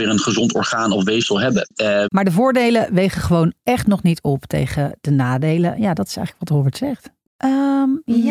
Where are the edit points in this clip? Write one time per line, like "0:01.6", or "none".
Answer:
0:02.0
0:07.2